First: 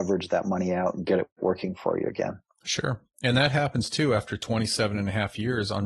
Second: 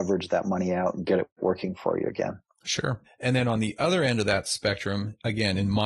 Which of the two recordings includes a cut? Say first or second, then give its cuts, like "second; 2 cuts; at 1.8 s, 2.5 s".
second; 1 cut; at 3.0 s